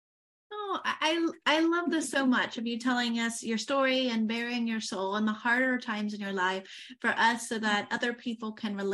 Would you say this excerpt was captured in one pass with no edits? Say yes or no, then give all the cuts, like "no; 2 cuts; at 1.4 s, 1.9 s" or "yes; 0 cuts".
yes; 0 cuts